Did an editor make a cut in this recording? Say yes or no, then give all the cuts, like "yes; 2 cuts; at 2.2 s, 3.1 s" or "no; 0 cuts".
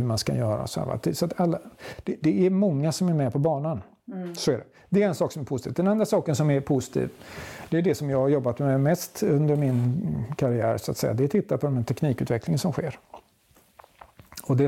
no; 0 cuts